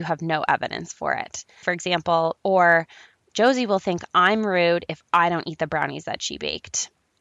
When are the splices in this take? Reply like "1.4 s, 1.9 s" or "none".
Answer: 2.4 s